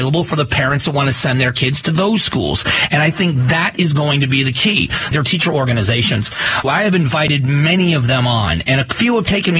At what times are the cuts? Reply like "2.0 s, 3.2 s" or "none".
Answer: 5.1 s, 6.6 s